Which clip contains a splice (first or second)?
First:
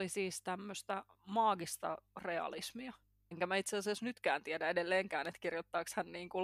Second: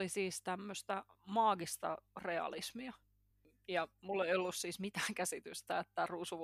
first